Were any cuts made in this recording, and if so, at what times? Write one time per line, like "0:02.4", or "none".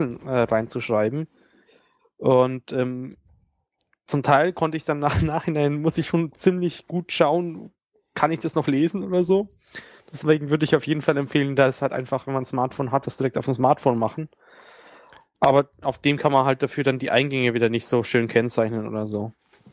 none

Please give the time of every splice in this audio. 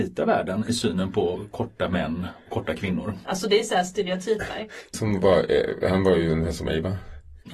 0:03.2
0:04.9

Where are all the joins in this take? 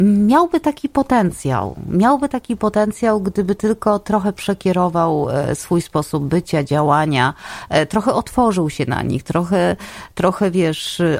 none

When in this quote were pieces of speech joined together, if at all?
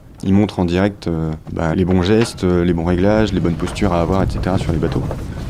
0:01.7

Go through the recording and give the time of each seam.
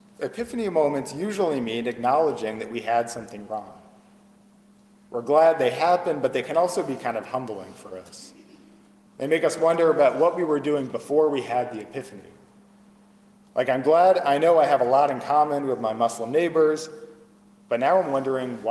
none

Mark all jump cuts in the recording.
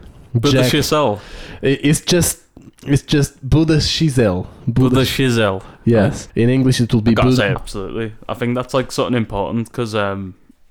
0:06.3
0:07.5

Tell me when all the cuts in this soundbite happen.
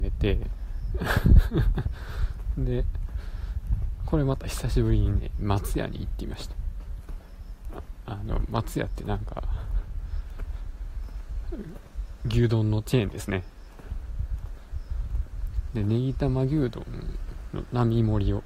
none

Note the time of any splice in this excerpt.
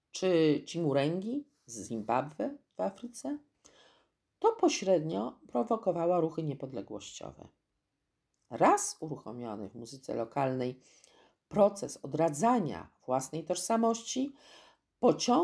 none

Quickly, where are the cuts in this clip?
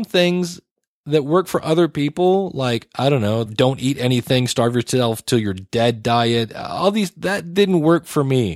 0:03.5

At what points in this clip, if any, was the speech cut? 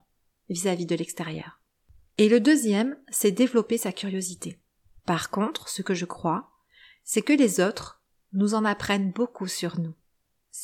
0:05.0

